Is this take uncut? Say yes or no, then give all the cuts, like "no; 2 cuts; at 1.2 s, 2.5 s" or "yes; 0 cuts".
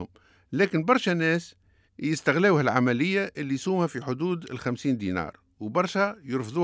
yes; 0 cuts